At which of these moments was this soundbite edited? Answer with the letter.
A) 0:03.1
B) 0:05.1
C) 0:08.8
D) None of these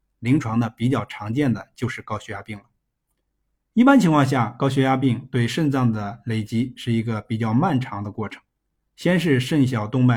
D